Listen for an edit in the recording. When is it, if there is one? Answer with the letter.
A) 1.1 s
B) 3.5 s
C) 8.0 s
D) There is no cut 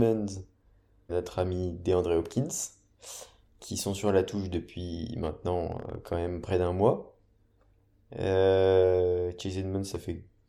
A